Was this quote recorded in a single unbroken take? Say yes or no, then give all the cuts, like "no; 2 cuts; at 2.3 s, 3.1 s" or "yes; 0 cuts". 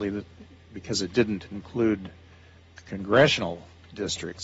yes; 0 cuts